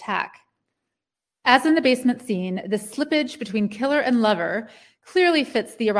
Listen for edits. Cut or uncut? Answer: uncut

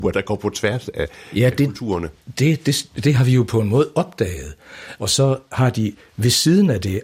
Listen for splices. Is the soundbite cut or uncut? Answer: cut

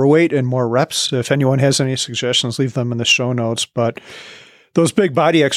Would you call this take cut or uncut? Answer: uncut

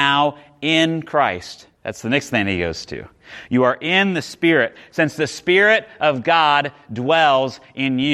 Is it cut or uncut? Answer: cut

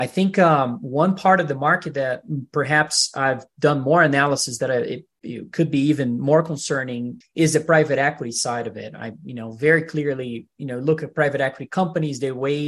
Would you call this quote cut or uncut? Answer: cut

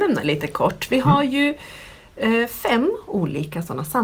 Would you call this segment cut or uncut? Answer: uncut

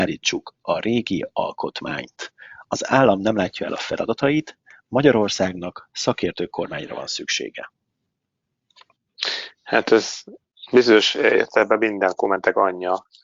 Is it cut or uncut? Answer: uncut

